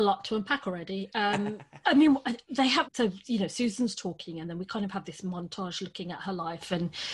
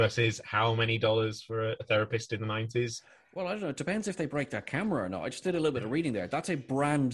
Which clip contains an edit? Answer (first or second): first